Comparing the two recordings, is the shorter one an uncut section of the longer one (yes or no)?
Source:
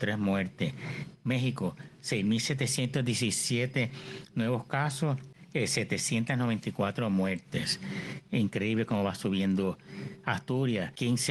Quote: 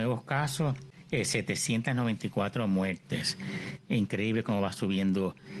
yes